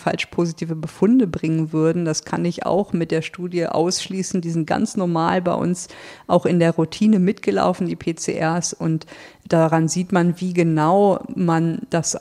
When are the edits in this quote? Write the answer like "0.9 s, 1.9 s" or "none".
none